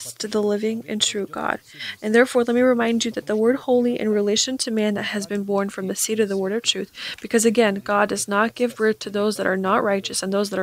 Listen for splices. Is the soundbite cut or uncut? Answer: uncut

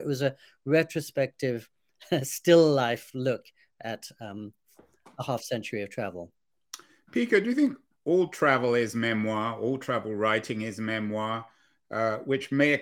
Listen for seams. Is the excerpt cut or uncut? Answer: uncut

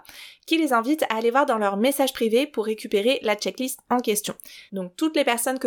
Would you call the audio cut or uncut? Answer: cut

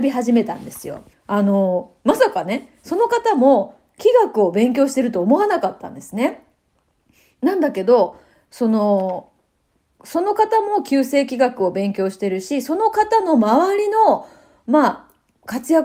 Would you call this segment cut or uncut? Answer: cut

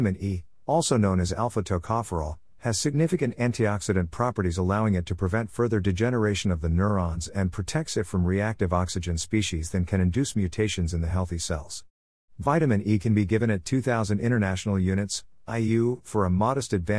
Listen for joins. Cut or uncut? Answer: uncut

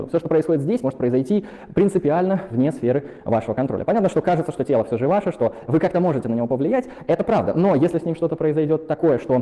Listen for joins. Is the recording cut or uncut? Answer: uncut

